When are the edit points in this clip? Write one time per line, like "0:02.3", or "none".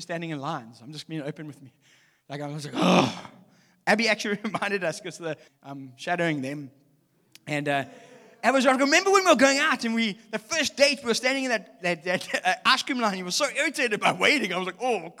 0:05.5